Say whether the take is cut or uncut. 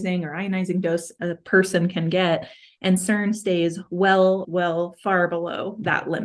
cut